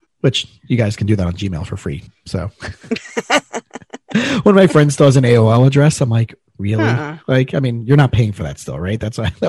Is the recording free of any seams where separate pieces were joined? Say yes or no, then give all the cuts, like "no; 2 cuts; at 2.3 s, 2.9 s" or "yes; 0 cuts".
yes; 0 cuts